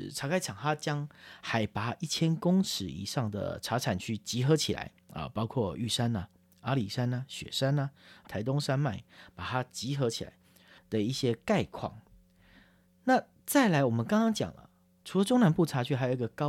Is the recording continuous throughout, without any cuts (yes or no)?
no